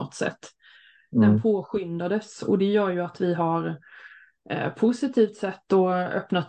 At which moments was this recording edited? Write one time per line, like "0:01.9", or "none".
none